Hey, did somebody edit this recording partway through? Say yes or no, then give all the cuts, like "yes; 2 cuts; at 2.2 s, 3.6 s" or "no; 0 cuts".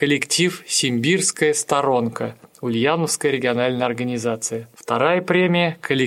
yes; 1 cut; at 4.7 s